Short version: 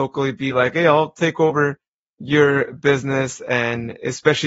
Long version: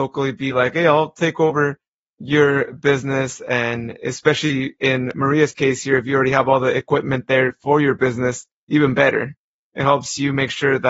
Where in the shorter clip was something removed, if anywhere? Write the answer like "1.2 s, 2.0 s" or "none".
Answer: none